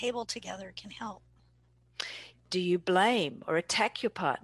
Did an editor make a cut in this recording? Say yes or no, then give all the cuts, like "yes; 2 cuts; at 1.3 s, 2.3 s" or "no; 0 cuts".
yes; 1 cut; at 2.3 s